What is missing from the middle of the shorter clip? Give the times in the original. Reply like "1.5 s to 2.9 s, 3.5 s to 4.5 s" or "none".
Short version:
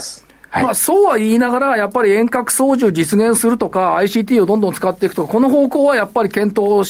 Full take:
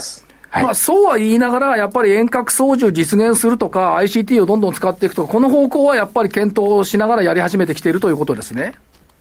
none